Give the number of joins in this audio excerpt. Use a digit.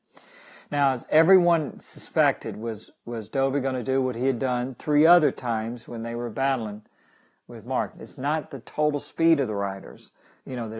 1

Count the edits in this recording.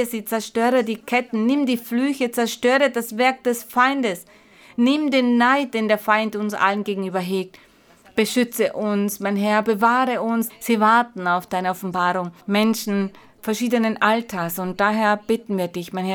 2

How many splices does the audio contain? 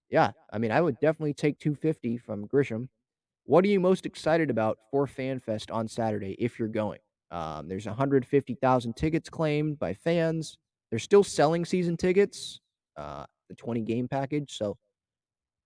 3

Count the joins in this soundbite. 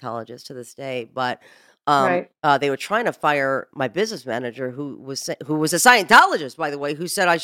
2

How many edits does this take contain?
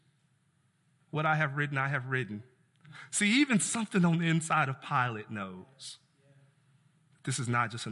1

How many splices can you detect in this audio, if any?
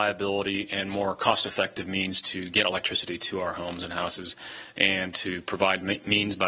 0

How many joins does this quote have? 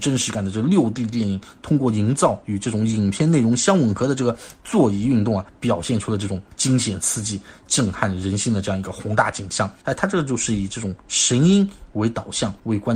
1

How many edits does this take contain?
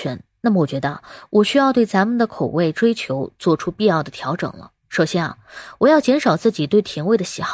1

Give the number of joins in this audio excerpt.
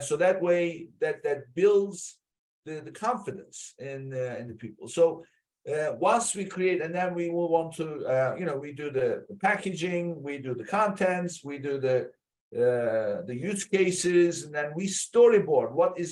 0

